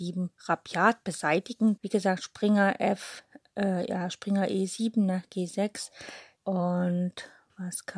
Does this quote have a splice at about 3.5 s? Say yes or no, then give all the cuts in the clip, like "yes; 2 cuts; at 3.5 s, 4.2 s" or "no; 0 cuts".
no; 2 cuts; at 1.8 s, 6.4 s